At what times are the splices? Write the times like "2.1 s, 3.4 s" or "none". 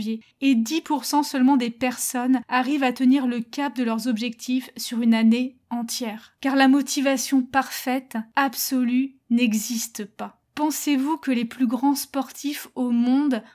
6.4 s